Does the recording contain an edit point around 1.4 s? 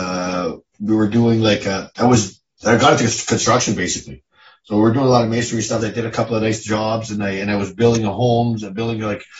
no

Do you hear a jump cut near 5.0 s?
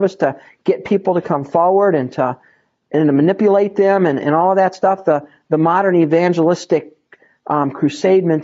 no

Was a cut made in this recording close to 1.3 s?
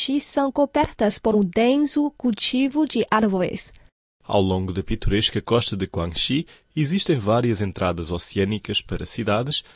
yes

